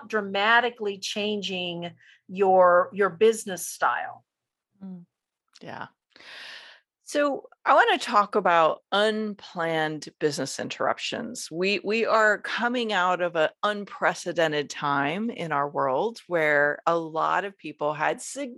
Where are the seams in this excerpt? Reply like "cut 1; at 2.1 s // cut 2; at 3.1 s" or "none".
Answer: none